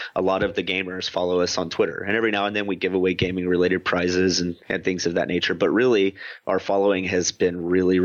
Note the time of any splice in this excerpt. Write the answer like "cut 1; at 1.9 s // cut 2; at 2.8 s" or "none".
none